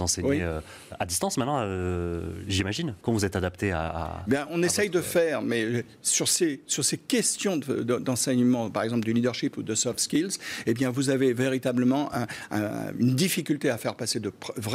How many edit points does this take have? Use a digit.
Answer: 1